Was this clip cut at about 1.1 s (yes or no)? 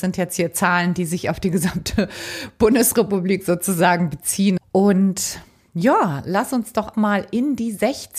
no